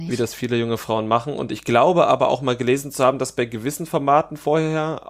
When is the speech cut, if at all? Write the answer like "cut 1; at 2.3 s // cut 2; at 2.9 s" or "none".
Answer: none